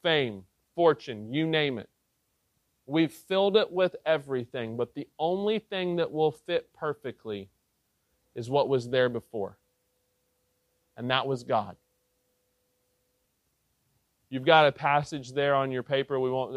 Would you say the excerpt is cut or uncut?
uncut